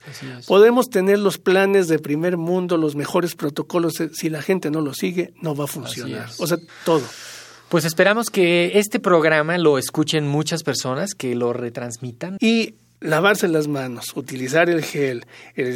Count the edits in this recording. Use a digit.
2